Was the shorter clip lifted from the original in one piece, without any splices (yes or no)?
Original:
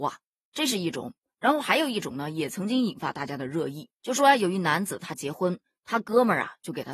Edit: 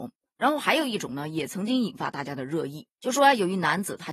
yes